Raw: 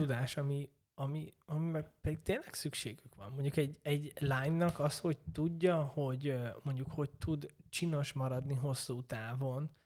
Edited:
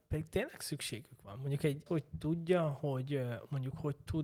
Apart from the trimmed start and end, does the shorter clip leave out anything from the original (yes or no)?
yes